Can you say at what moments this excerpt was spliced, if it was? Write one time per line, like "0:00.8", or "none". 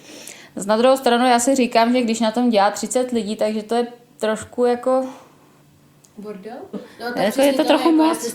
0:06.7